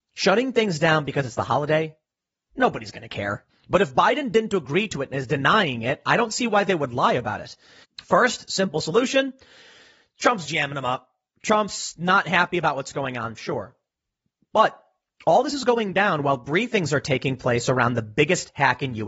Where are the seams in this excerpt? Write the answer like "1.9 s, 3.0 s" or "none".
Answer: 3.5 s, 7.8 s, 10.5 s

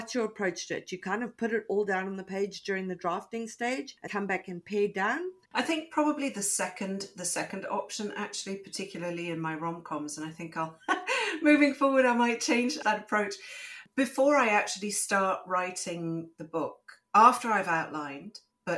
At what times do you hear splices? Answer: 4.1 s, 5.4 s

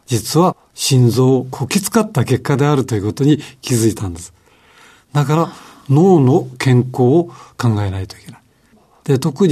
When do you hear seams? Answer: none

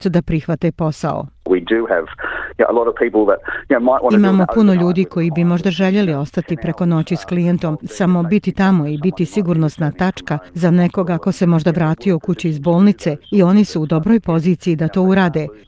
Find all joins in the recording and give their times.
7.8 s

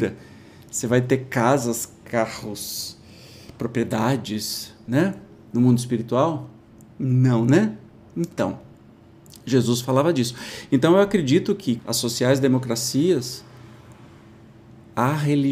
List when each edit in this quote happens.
11.8 s

